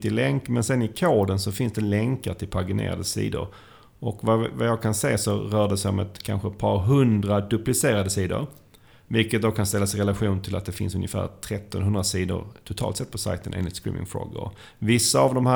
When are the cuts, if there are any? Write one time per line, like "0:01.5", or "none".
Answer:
none